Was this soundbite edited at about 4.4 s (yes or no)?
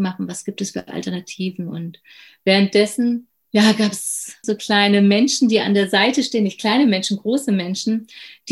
yes